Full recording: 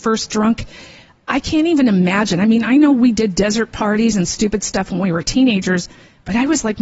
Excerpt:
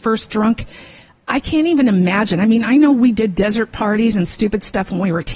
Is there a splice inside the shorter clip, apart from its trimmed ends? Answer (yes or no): no